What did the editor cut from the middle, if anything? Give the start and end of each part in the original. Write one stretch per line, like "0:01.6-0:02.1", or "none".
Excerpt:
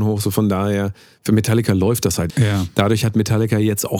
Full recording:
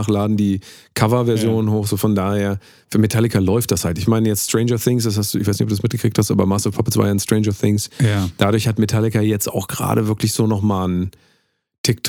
0:04.0-0:07.9